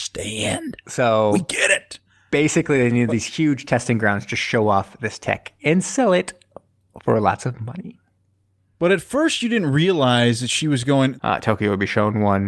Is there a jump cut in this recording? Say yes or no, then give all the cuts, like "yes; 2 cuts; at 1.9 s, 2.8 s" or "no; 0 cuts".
yes; 1 cut; at 11.2 s